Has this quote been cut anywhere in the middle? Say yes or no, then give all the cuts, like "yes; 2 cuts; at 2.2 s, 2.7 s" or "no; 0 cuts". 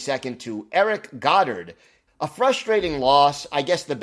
yes; 1 cut; at 2.1 s